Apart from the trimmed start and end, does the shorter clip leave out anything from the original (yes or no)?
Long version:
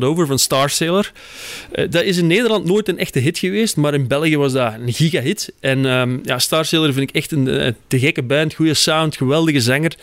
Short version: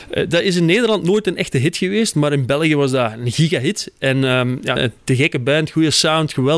yes